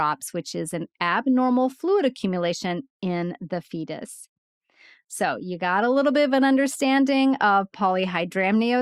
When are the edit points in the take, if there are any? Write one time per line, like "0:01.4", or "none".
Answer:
none